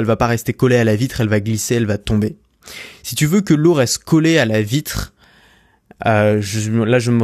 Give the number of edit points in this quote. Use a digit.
0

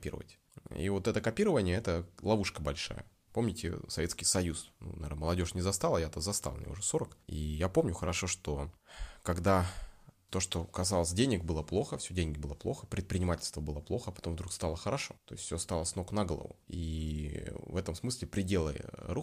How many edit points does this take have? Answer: 2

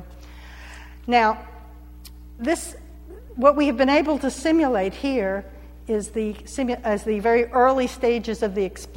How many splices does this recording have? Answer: 0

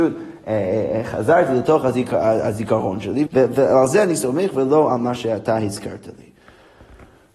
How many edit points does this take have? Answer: 1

